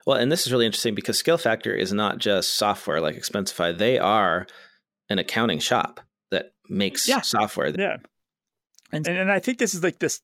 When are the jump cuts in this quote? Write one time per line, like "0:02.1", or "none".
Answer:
0:07.7
0:09.0